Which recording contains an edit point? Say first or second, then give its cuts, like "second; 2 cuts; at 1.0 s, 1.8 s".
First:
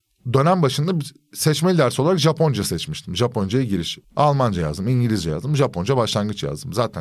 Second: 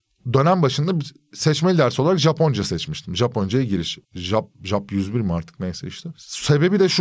first; 1 cut; at 4.0 s